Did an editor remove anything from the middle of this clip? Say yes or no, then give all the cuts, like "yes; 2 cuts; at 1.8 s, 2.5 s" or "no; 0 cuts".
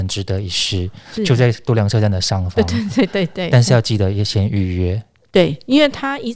no; 0 cuts